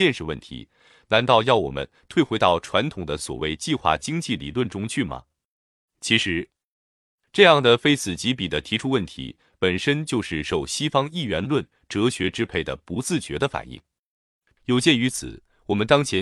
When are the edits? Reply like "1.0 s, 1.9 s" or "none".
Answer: 14.5 s